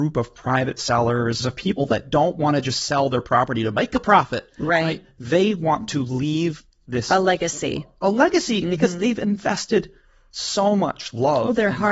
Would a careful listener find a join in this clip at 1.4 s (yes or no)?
yes